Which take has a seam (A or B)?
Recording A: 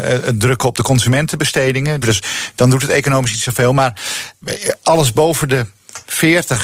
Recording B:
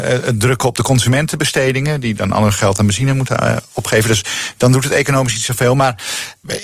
A